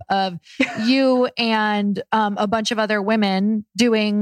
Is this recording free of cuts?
yes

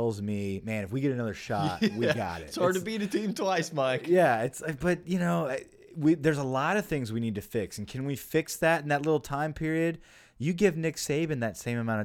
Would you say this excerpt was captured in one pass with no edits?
yes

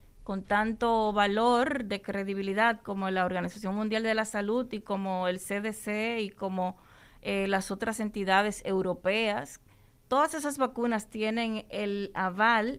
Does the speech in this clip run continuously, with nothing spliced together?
yes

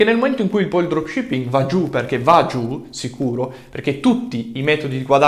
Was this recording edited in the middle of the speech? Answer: no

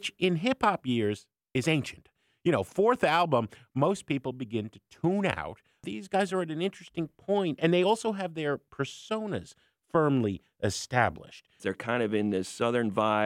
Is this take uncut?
no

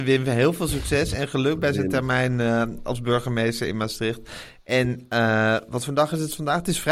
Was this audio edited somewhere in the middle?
no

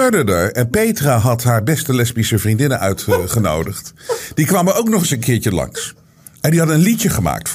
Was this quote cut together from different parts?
no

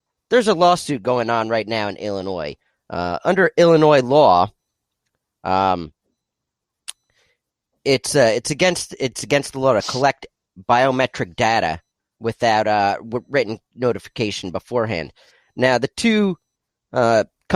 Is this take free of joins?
yes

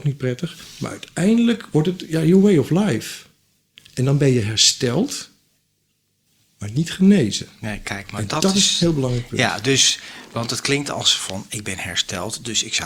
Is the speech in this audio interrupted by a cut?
no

